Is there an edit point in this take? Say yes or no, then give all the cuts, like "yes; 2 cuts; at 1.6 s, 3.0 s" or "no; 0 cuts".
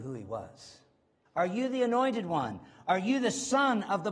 yes; 1 cut; at 1.3 s